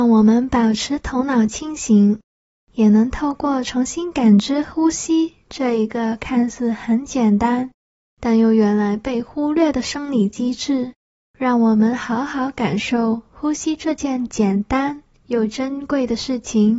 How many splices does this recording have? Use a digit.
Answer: 0